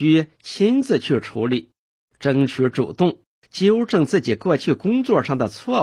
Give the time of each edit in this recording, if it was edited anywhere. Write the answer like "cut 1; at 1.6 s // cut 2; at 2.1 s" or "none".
cut 1; at 3.3 s